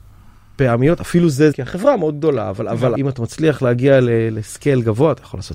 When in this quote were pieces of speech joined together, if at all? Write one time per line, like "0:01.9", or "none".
0:01.5
0:03.0